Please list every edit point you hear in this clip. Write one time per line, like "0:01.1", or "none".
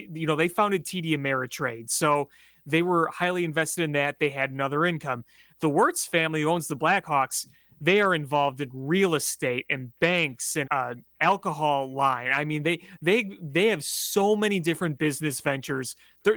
0:10.6